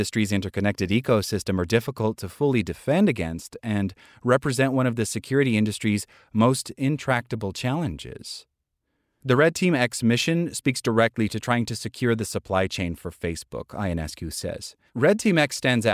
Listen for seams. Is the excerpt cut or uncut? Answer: cut